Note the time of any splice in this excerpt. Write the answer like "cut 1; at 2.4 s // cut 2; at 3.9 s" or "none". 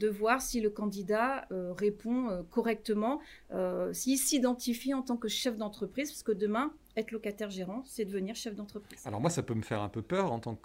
none